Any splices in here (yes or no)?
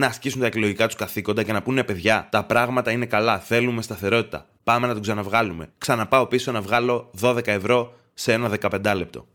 no